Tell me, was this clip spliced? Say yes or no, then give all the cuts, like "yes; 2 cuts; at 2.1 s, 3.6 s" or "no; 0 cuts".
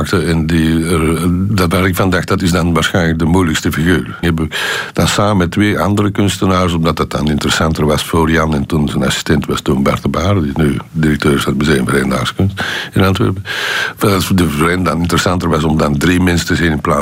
yes; 2 cuts; at 1.5 s, 4.2 s